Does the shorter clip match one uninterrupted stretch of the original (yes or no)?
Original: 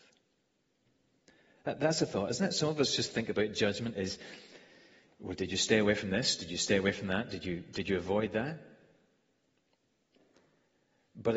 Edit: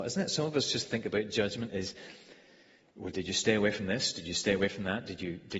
yes